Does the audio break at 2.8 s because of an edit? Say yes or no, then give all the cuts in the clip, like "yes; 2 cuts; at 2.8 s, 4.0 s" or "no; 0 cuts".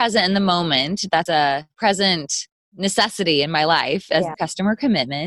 no; 2 cuts; at 1.3 s, 4.3 s